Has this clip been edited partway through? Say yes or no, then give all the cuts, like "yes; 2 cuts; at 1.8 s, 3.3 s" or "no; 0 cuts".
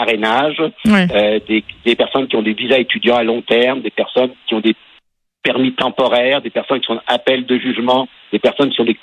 no; 0 cuts